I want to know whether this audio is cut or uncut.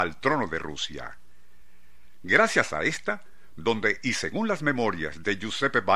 cut